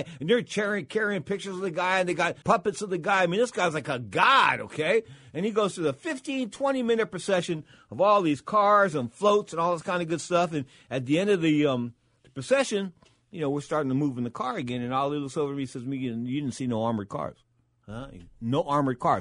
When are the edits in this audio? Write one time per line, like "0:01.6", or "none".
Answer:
0:02.4